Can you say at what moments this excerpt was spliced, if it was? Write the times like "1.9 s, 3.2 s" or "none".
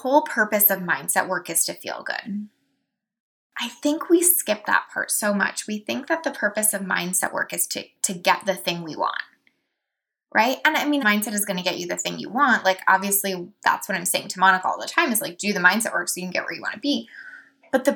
11.0 s